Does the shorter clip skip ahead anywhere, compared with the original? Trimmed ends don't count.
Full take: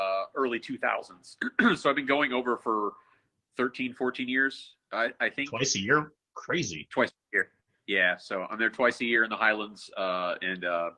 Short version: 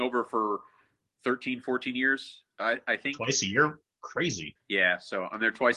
yes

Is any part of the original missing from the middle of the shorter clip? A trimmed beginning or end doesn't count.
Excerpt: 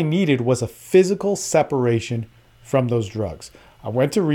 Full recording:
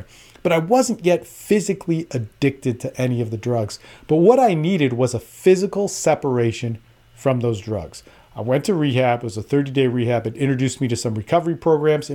no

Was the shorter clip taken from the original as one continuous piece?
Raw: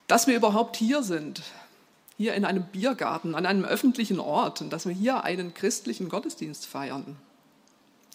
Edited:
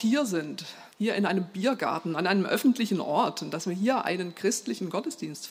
no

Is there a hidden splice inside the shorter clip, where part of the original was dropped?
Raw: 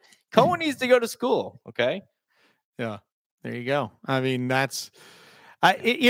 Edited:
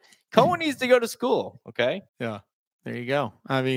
yes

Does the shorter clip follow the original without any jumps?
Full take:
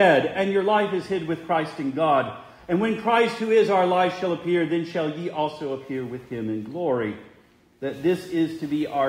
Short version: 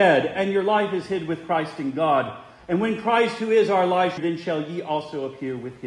no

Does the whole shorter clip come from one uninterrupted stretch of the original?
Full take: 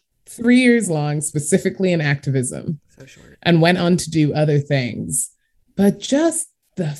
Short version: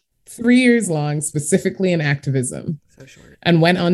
yes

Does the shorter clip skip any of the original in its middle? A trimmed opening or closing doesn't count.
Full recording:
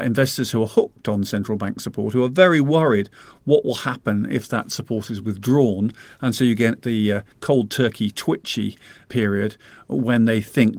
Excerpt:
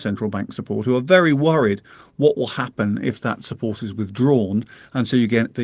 no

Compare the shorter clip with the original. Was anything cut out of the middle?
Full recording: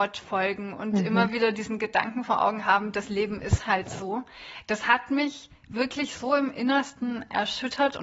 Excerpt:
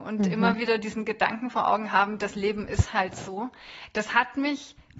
no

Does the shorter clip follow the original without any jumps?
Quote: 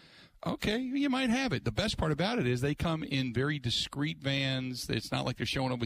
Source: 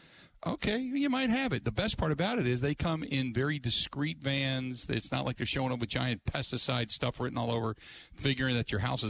yes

